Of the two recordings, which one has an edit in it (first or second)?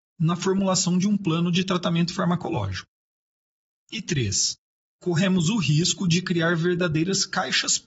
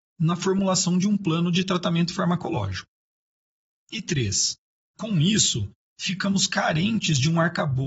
second